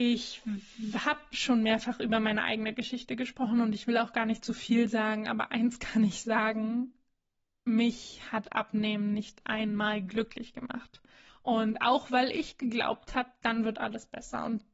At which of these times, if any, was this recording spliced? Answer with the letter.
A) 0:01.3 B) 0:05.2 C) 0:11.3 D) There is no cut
C